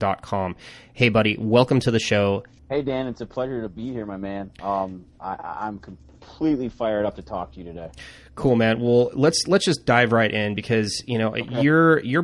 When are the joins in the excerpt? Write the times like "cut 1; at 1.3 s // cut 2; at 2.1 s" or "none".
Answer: cut 1; at 2.6 s